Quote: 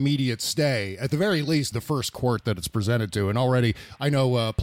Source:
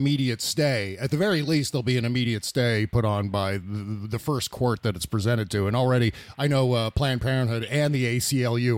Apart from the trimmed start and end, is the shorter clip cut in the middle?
yes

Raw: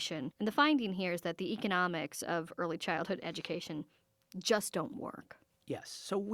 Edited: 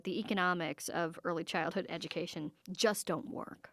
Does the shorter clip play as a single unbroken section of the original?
no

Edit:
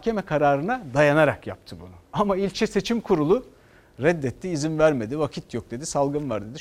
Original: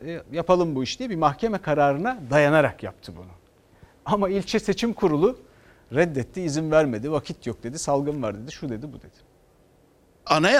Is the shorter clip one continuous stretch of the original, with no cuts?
no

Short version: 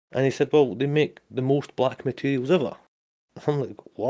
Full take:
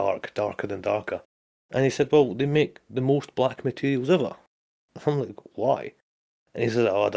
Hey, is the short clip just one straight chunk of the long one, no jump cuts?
yes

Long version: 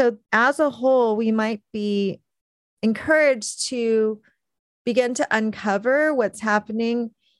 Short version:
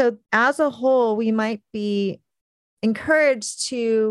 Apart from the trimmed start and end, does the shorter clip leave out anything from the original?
no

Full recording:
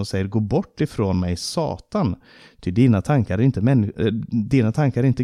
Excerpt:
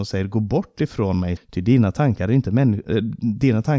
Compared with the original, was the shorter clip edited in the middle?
yes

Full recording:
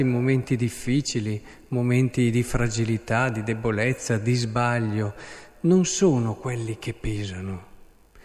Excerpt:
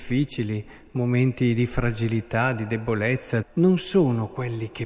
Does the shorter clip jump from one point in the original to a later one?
yes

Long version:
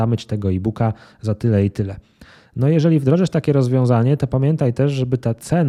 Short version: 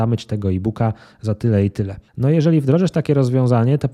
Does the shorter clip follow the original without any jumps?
no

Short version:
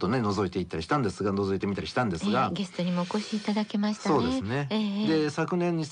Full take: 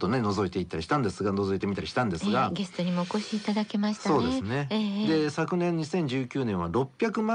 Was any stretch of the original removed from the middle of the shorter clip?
no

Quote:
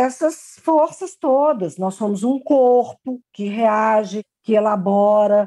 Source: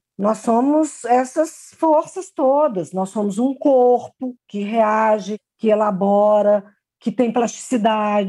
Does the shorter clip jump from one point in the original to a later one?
no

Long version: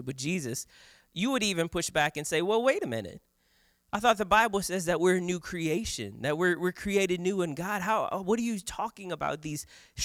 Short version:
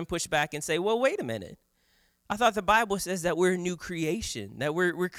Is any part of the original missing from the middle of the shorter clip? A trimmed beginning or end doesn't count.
no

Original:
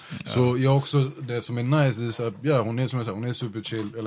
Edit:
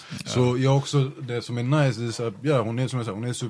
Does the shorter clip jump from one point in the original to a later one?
no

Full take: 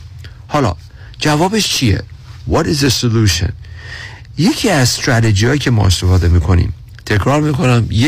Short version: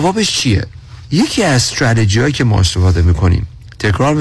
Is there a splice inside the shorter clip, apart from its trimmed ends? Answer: yes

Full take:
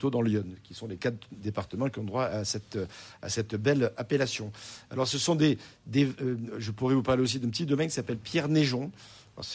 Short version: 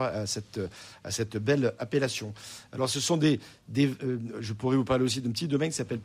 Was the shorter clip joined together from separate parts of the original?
no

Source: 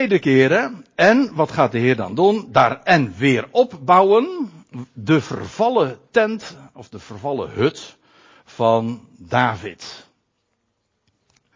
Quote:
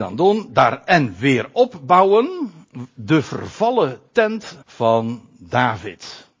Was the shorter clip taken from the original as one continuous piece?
no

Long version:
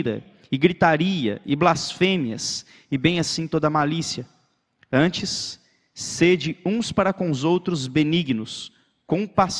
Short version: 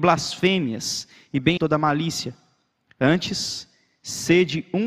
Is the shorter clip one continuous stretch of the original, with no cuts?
no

